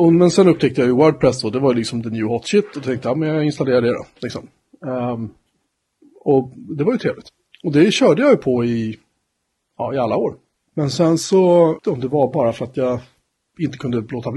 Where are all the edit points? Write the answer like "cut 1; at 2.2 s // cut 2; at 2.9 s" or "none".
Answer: cut 1; at 11.8 s